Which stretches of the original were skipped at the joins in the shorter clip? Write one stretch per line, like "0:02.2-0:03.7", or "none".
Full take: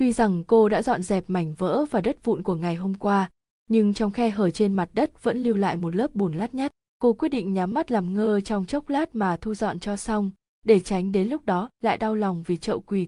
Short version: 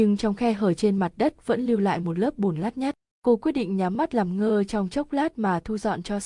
none